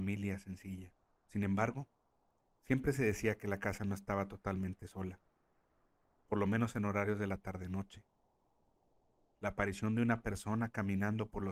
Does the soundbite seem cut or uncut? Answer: uncut